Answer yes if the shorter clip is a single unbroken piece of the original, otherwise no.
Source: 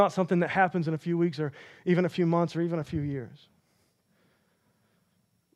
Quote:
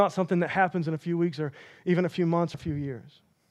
no